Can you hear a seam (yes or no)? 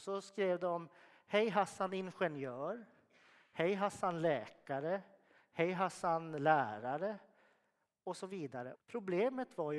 yes